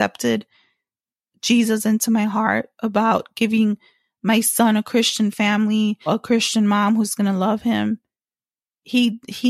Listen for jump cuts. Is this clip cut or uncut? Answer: cut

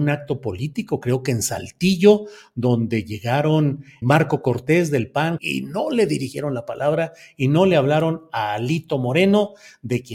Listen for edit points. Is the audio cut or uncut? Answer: cut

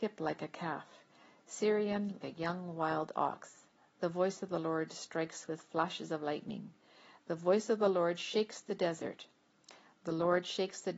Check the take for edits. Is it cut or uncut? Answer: cut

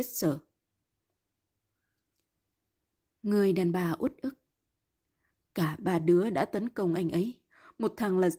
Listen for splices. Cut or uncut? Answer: uncut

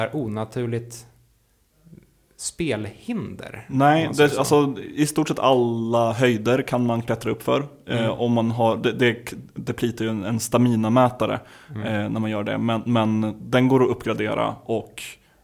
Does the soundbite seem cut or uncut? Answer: uncut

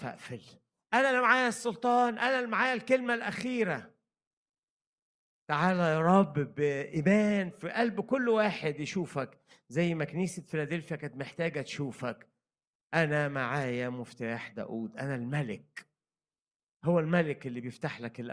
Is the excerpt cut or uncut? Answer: uncut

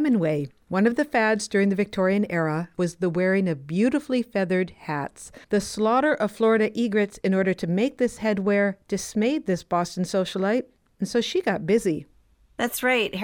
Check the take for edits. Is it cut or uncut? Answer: cut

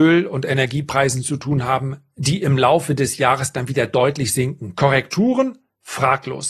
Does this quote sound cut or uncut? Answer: uncut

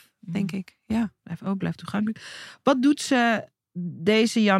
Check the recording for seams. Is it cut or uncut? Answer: uncut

